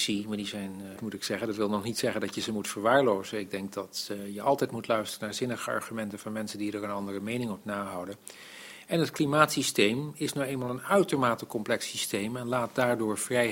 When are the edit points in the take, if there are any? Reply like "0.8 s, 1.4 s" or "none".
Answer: 1.0 s